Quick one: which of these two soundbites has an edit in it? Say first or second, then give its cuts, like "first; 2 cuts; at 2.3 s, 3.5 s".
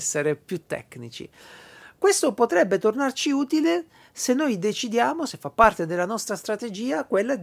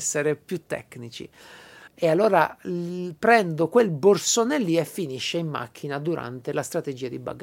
second; 1 cut; at 1.9 s